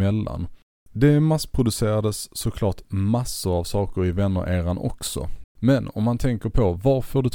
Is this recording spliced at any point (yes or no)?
yes